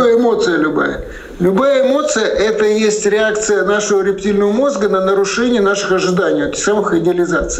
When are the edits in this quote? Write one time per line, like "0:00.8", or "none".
none